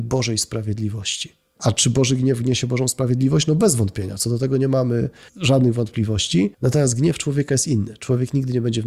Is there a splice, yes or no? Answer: yes